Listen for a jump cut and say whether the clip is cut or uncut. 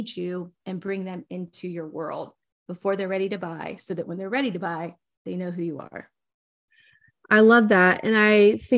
uncut